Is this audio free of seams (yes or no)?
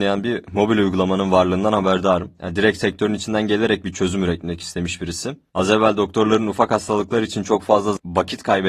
no